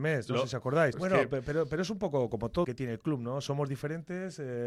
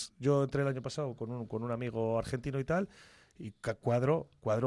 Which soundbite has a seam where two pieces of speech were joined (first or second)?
first